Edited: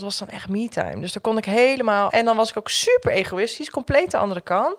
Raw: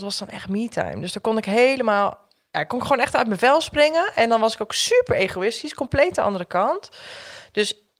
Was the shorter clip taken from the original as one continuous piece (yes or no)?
no